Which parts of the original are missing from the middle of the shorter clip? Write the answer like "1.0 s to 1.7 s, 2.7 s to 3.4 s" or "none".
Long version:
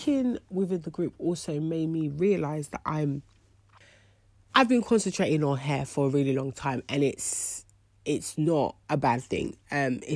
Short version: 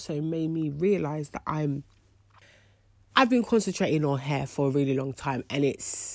none